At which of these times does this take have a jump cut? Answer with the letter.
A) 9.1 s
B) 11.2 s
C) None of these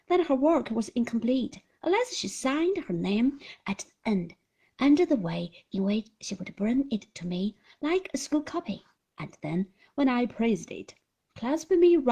C